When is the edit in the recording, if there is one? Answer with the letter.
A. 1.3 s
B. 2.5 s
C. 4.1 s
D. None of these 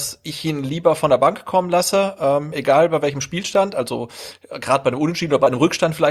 D